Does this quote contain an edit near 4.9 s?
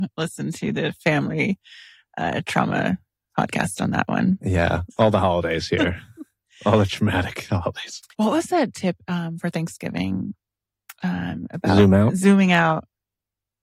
yes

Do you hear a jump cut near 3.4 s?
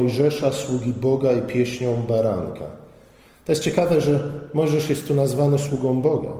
no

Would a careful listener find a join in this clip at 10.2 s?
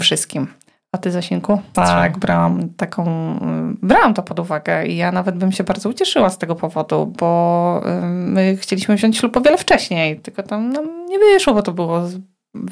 no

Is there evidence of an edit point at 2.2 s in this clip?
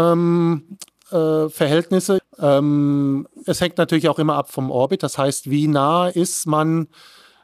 yes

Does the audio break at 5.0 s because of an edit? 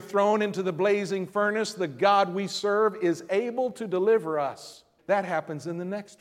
yes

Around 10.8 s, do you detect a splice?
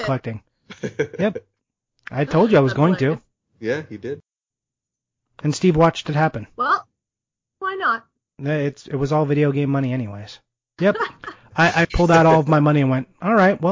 yes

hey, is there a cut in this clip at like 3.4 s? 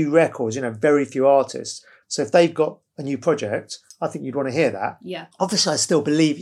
no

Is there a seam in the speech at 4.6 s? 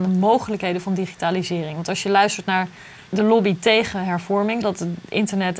yes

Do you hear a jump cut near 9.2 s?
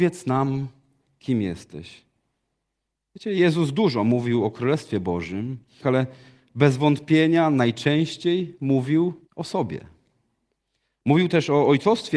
yes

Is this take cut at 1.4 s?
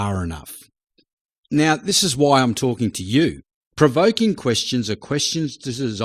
no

